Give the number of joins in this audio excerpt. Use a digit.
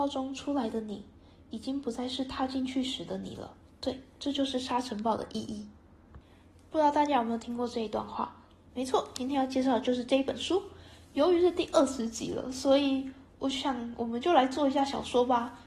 1